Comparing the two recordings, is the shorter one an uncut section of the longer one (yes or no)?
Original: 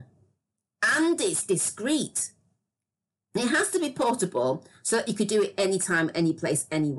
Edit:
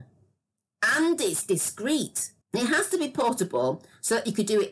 no